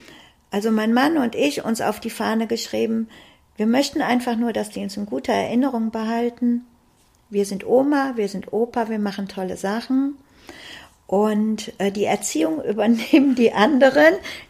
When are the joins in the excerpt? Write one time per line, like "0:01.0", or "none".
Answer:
none

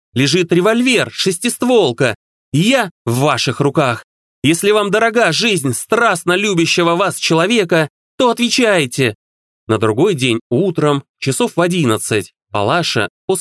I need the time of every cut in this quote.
0:09.5

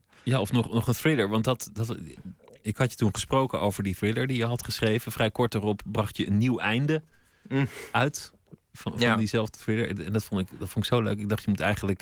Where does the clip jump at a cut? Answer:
none

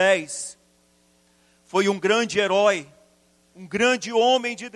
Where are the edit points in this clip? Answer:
0:03.5

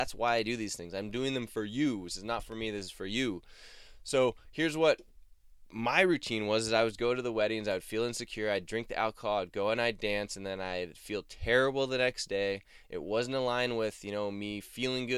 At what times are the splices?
none

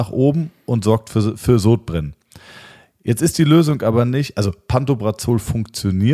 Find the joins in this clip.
none

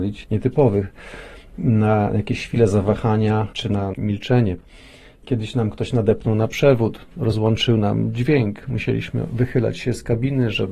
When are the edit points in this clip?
none

